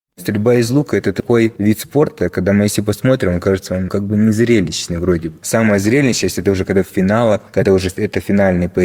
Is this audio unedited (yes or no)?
yes